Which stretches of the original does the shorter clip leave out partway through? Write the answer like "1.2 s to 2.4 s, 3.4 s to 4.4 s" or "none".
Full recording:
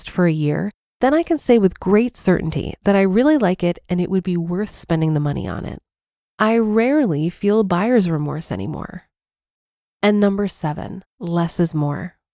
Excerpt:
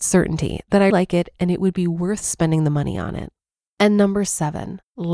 3.0 s to 3.4 s, 6.2 s to 10.0 s